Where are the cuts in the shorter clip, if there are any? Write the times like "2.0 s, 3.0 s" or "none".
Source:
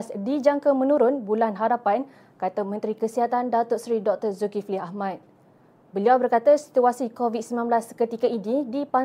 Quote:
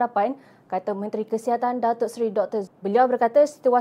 2.7 s